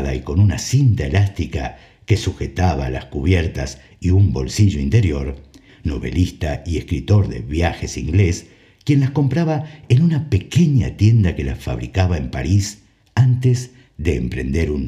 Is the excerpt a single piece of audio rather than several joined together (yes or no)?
no